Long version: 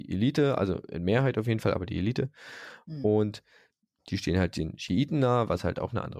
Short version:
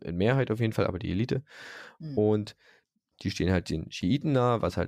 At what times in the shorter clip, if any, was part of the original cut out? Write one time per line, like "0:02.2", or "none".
none